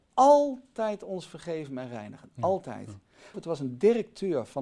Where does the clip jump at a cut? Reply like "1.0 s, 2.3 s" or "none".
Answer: 3.3 s